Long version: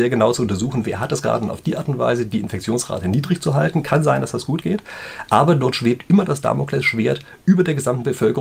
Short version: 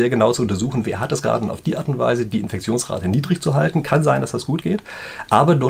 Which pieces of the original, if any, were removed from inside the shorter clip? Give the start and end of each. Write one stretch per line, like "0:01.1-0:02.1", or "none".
none